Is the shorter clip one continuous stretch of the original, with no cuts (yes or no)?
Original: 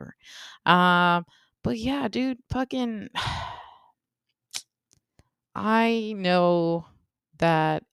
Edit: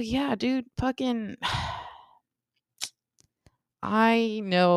yes